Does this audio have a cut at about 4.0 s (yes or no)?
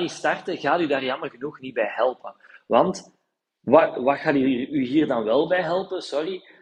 yes